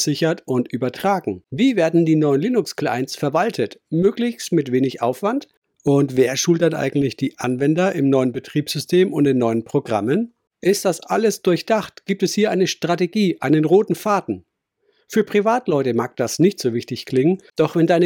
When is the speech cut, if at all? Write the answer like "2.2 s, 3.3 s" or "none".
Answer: none